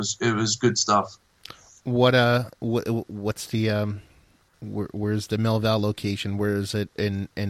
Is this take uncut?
yes; 0 cuts

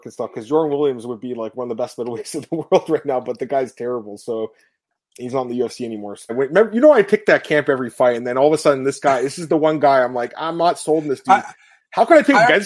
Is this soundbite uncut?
no; 1 cut; at 6.3 s

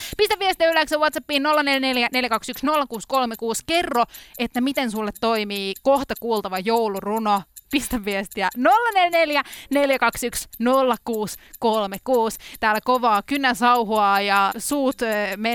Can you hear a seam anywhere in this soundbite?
yes; 2 cuts; at 7.6 s, 14.5 s

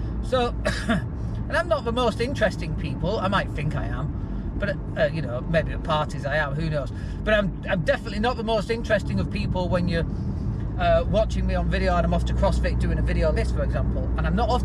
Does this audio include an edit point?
yes; 1 cut; at 13.3 s

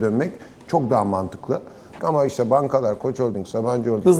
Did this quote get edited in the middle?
yes; 1 cut; at 2.0 s

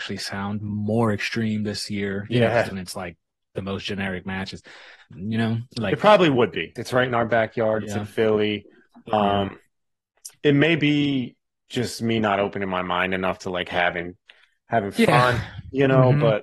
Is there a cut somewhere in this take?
yes; 3 cuts; at 2.7 s, 5.1 s, 6.8 s

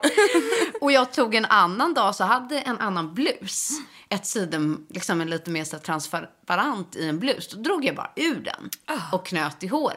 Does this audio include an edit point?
no; 0 cuts

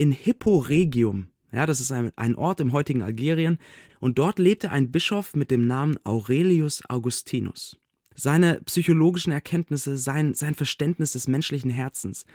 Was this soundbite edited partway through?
yes; 2 cuts; at 3.9 s, 8.1 s

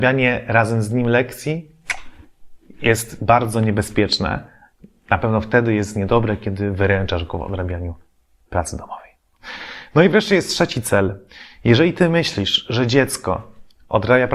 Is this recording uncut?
yes; 0 cuts

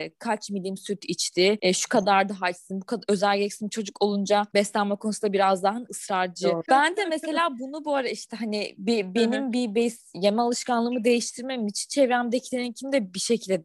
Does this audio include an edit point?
yes; 1 cut; at 6.6 s

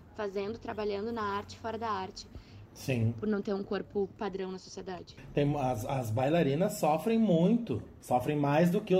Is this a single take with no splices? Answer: no; 1 cut; at 2.7 s

